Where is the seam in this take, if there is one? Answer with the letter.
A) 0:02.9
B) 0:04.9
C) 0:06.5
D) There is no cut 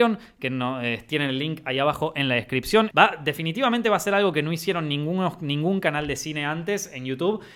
A